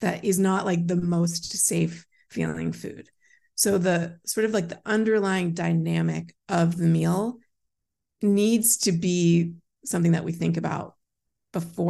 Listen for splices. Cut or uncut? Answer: uncut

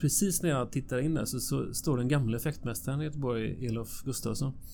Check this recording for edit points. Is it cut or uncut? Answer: uncut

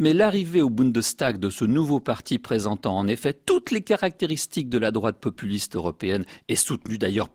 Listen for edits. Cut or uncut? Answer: uncut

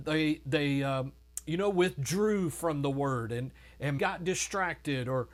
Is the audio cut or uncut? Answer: cut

